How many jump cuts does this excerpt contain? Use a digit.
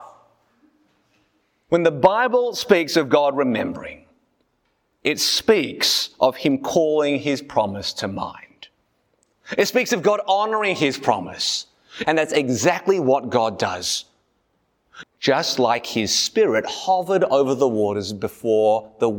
2